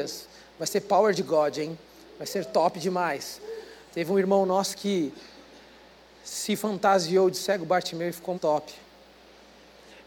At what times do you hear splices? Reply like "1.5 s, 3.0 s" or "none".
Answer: 8.3 s